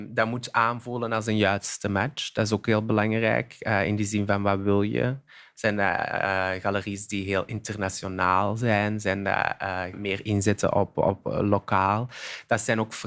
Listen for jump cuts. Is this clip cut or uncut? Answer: cut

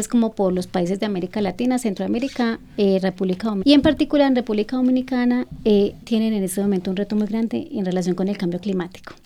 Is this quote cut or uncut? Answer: cut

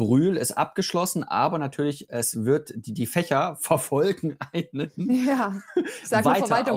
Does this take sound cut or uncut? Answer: uncut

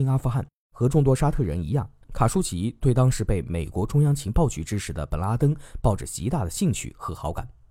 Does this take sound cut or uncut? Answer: uncut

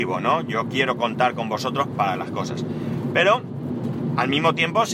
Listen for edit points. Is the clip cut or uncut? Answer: cut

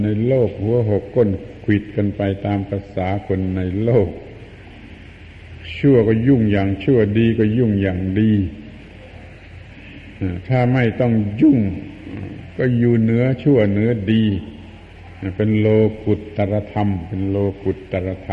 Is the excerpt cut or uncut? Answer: uncut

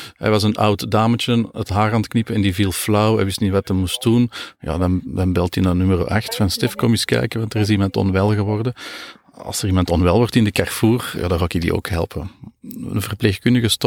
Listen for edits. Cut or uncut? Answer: uncut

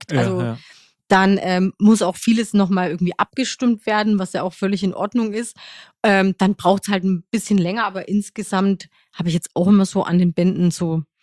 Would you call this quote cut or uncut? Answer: uncut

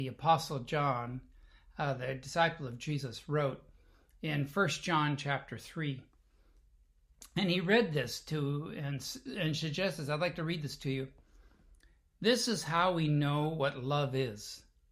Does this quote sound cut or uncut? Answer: uncut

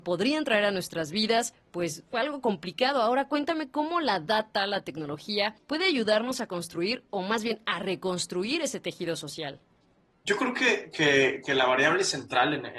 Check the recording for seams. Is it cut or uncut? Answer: uncut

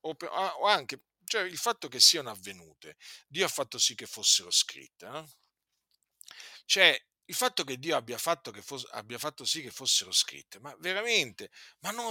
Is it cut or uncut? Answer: uncut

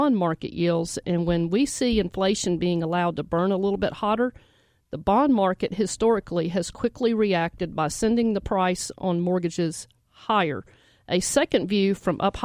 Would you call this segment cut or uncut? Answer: uncut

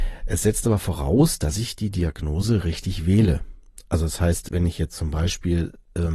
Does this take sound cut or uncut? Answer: uncut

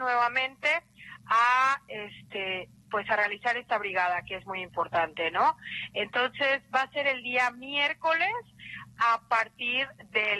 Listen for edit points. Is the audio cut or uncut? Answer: uncut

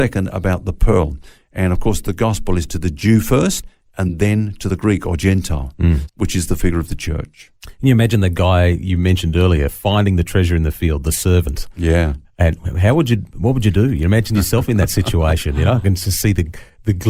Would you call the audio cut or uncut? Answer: cut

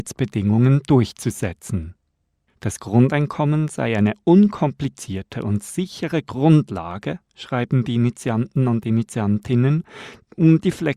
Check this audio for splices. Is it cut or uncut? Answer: cut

